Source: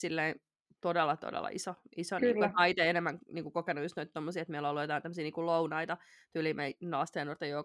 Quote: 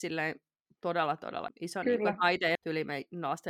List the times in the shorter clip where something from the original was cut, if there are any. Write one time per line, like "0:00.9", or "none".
0:01.5
0:02.6